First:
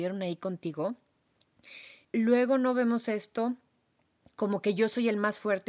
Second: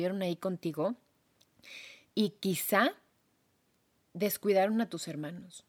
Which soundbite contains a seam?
first; 1 cut; at 2.0 s

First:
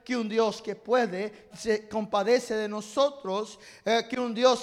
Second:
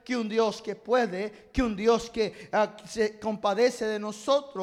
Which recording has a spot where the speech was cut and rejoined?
first; 1 cut; at 1.5 s

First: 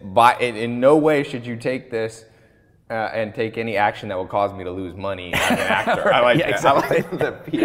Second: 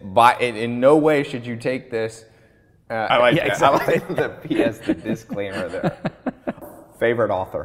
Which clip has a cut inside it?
second; 1 cut; at 3.1 s

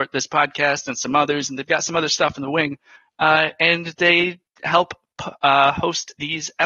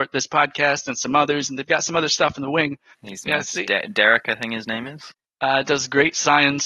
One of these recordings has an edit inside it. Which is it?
second; 2 cuts; at 2.9 s, 5.2 s

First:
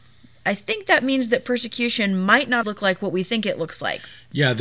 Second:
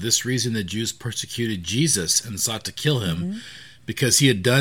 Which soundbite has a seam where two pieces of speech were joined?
first; 1 cut; at 2.6 s

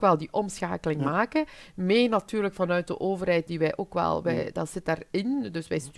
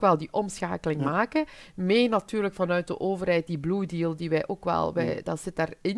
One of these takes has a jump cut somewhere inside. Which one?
first; 1 cut; at 3.5 s

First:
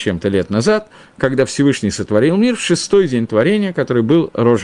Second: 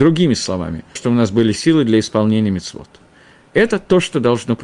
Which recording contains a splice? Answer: second; 1 cut; at 1.0 s

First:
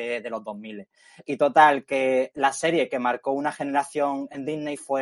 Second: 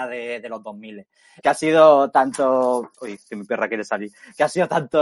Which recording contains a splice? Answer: second; 1 cut; at 1.4 s

